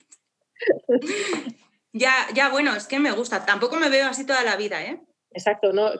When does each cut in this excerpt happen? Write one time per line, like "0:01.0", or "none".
none